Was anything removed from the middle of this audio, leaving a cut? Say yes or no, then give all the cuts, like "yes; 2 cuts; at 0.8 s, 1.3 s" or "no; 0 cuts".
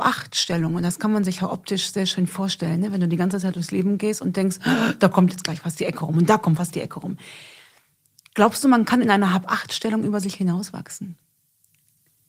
no; 0 cuts